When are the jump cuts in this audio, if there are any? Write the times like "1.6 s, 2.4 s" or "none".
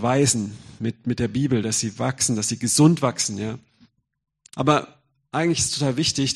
4.5 s